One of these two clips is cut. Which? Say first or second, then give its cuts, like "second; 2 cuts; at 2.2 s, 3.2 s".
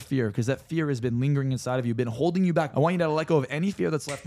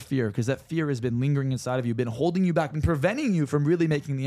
first; 1 cut; at 2.7 s